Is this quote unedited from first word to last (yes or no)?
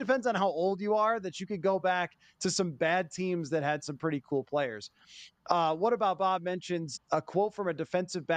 no